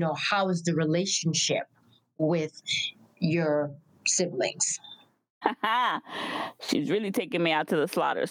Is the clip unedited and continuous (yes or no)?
yes